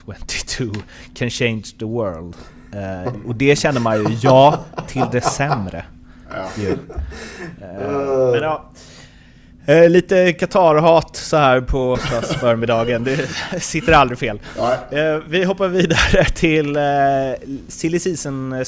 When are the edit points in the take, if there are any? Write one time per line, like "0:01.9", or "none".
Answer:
0:11.9